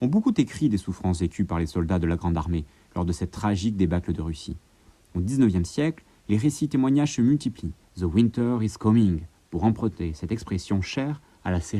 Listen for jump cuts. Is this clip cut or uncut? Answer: cut